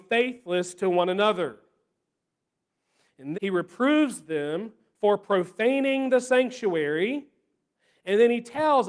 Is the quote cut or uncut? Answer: cut